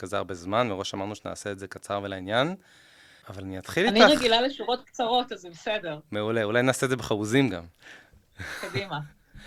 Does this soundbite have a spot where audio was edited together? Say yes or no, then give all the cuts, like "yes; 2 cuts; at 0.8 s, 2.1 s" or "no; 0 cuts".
no; 0 cuts